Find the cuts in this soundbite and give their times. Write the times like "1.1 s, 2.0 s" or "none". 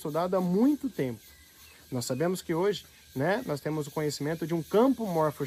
none